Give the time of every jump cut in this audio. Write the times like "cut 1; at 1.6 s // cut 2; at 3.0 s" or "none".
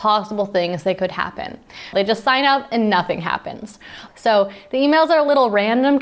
cut 1; at 1.9 s // cut 2; at 4.1 s